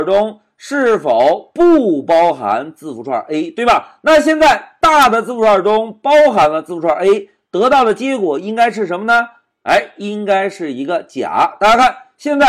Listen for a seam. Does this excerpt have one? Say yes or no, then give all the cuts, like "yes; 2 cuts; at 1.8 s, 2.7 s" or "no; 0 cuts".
no; 0 cuts